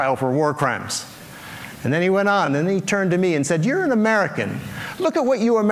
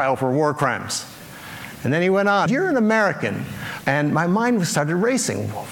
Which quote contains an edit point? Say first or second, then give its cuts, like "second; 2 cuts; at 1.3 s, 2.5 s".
second; 2 cuts; at 2.5 s, 3.8 s